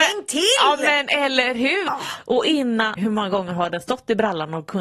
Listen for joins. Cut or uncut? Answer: cut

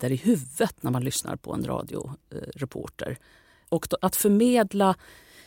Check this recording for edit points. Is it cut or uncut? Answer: cut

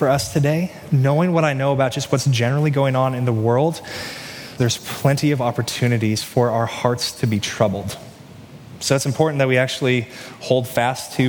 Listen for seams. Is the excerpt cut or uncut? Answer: cut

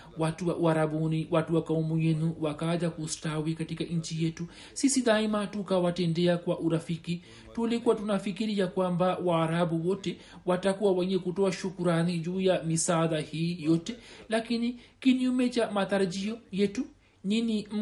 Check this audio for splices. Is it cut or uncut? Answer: uncut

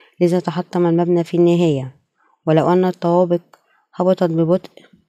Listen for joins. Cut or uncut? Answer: uncut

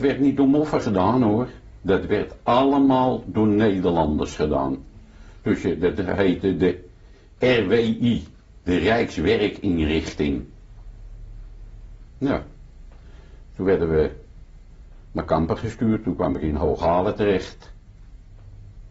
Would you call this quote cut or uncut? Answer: uncut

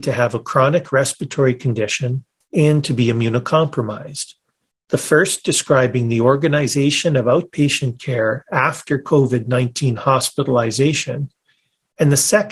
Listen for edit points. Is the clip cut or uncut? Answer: cut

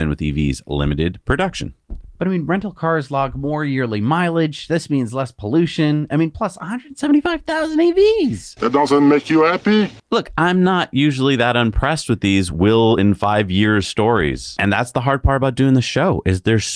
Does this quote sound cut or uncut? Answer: uncut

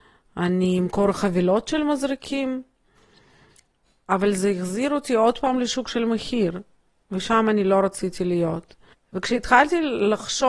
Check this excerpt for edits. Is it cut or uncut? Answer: cut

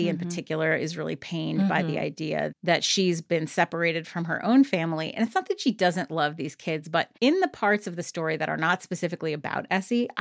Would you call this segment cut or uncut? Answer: cut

